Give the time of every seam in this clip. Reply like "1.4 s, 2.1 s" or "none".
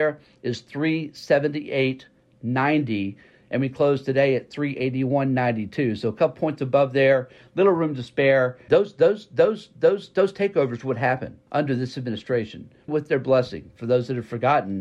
8.7 s, 11.5 s, 12.9 s